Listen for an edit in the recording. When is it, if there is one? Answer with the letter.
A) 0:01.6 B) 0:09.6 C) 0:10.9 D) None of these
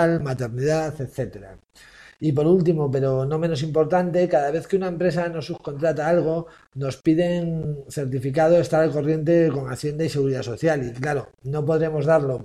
D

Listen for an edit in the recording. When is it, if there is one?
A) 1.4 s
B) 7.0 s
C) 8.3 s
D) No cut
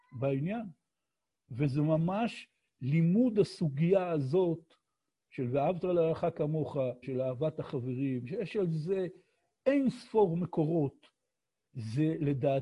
B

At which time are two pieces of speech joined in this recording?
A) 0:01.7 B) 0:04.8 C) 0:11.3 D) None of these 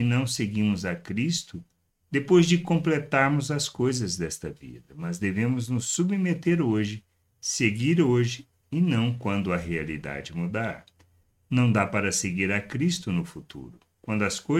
D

